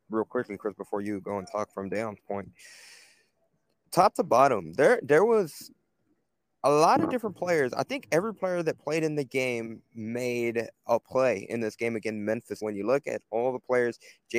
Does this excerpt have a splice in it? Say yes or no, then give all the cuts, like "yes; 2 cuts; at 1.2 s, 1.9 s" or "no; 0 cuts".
yes; 1 cut; at 12.6 s